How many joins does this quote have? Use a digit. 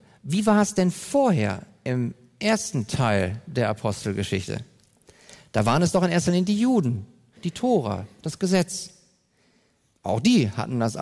2